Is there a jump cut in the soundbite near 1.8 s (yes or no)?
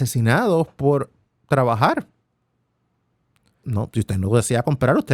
no